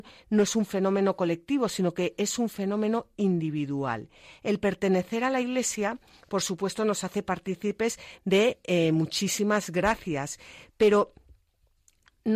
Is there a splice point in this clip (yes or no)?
no